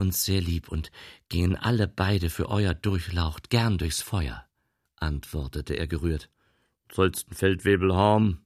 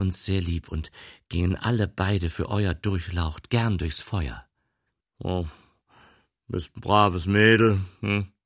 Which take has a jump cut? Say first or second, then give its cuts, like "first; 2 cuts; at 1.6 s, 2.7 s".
first; 1 cut; at 4.9 s